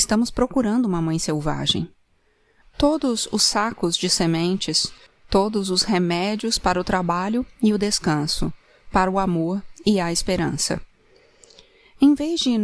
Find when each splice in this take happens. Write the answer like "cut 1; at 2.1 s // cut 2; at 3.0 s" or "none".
cut 1; at 2.6 s // cut 2; at 5.1 s